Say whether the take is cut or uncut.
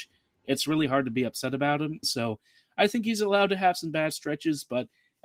cut